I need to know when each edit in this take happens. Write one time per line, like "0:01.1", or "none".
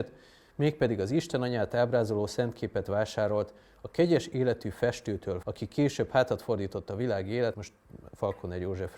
0:05.4
0:07.5